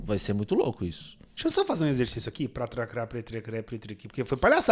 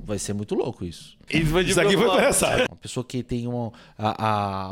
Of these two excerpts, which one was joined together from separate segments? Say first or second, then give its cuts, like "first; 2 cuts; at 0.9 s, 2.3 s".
second; 2 cuts; at 1.3 s, 2.7 s